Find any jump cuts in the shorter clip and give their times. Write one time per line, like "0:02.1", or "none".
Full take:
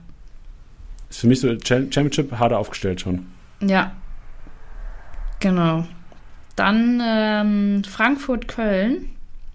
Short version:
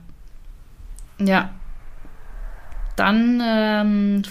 0:01.1
0:03.0